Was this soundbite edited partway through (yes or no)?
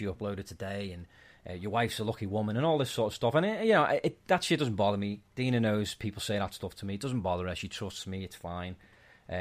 no